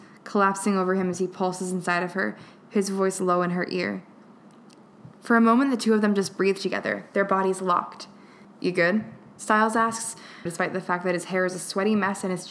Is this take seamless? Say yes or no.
no